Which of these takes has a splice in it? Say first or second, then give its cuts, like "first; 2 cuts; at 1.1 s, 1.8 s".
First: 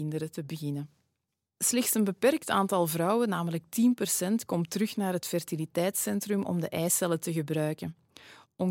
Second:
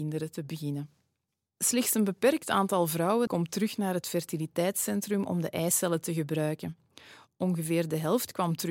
second; 1 cut; at 3.3 s